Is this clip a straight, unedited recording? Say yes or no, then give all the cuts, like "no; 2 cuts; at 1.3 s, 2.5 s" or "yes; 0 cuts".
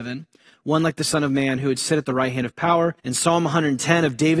no; 1 cut; at 3.0 s